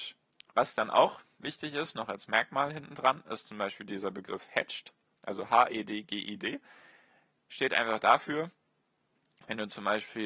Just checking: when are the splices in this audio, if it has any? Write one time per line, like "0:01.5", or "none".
none